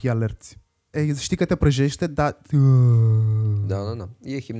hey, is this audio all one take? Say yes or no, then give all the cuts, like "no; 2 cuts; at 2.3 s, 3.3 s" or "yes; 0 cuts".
no; 1 cut; at 0.9 s